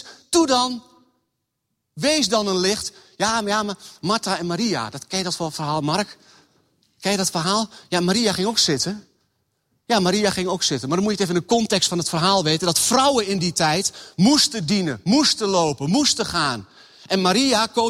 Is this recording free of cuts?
yes; 0 cuts

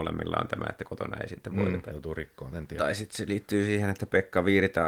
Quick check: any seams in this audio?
yes; 1 cut; at 1.9 s

